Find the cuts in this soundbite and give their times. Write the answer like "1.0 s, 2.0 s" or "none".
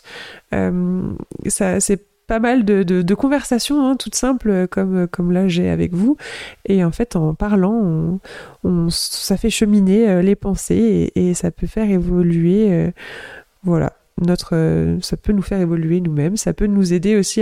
none